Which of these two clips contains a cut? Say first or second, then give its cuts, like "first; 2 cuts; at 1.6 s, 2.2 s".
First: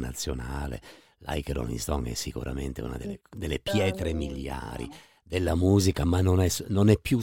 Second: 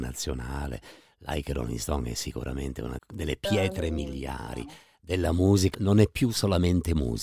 second; 2 cuts; at 3.0 s, 5.7 s